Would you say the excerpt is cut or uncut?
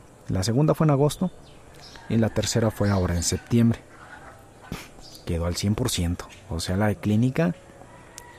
uncut